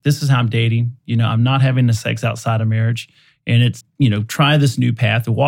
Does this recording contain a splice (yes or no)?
yes